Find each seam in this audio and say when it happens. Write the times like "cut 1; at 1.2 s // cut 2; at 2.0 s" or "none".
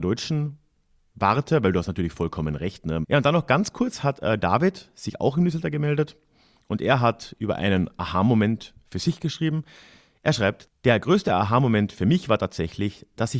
cut 1; at 3.0 s // cut 2; at 10.7 s